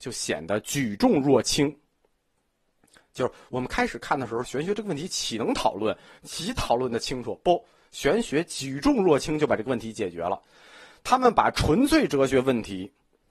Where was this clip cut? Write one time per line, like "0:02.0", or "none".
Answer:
0:04.4